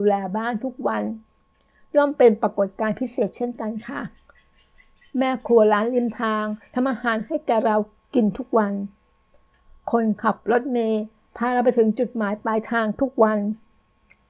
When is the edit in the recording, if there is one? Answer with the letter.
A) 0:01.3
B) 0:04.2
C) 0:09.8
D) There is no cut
D